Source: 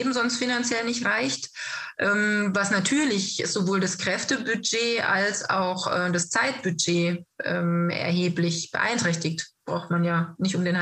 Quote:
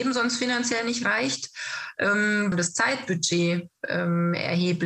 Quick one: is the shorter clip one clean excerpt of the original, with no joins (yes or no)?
no